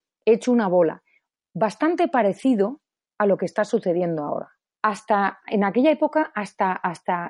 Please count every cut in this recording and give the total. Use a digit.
1